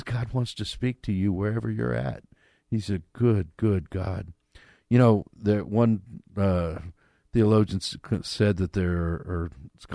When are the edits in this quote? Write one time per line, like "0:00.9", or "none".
none

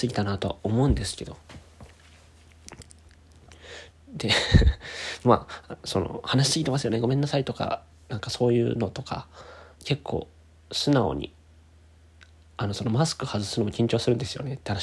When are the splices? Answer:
0:03.9
0:09.7

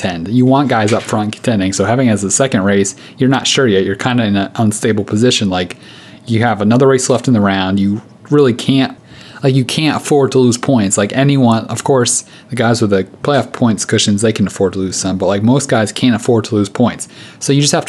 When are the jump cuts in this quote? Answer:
none

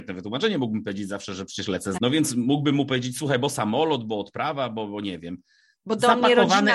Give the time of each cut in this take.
0:02.0
0:05.8

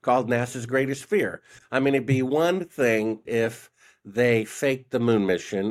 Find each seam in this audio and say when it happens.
0:03.3

